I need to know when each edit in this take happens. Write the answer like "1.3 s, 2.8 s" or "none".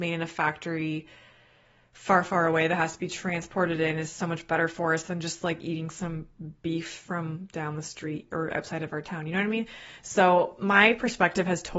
none